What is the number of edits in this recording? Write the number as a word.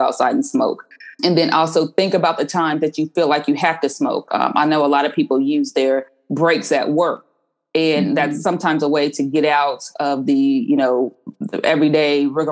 one